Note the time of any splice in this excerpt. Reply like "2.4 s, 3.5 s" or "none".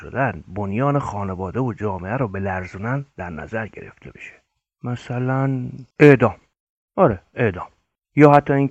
5.9 s